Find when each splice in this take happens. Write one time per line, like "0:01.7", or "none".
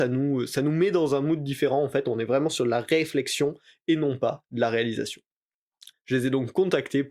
0:05.9